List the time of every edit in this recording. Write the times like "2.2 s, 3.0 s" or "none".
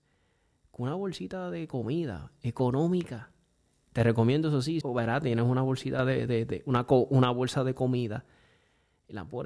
4.8 s, 6.3 s